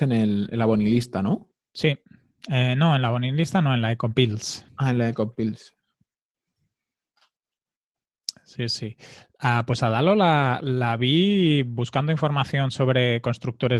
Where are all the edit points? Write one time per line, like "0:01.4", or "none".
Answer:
none

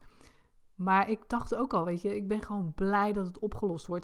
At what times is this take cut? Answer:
none

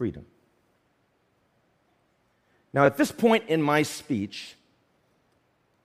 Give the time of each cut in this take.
none

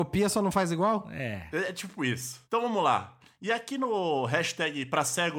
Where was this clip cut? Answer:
none

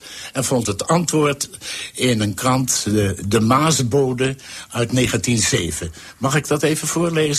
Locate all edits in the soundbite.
none

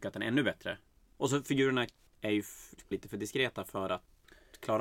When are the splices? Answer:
0:01.2
0:02.9

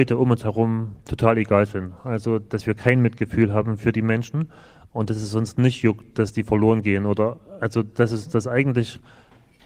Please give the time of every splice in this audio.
none

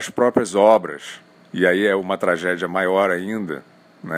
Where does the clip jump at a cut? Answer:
none

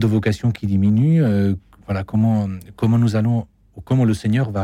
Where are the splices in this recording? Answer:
none

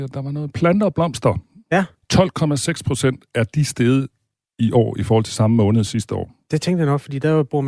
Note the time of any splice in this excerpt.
none

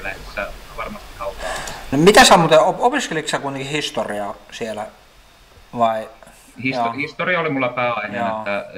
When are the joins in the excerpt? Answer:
none

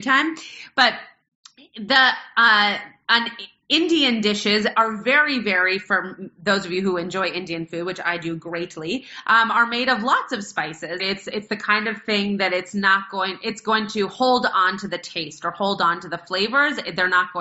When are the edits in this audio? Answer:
0:11.0

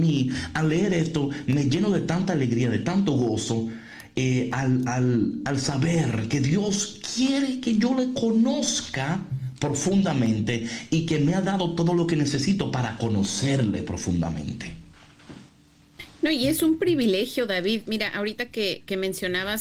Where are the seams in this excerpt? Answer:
none

